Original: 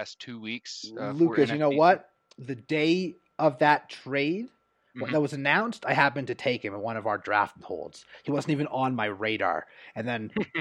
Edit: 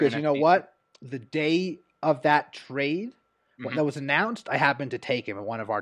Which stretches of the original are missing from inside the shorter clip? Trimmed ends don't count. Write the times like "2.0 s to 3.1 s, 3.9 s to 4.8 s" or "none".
none